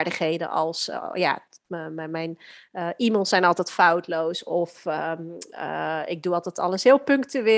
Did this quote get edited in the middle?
no; 0 cuts

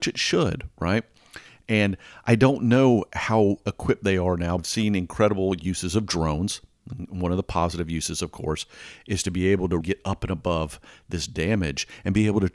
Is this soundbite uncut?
no; 2 cuts; at 4.6 s, 9.8 s

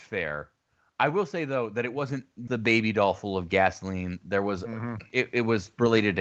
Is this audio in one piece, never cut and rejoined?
no; 1 cut; at 2.5 s

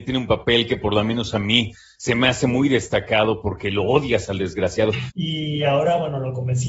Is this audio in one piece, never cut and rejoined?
no; 1 cut; at 5.1 s

